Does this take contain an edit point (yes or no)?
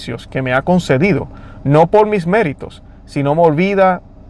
no